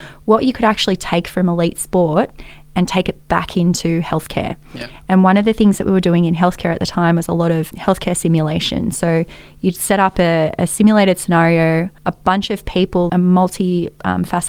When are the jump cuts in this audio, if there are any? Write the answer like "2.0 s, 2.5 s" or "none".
12.0 s, 13.1 s